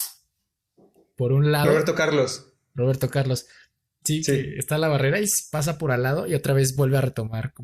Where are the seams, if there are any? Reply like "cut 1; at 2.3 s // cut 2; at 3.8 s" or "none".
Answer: none